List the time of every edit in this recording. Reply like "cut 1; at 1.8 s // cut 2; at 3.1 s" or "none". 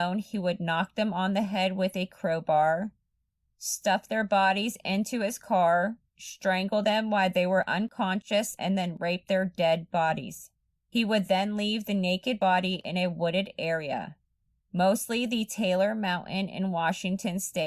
none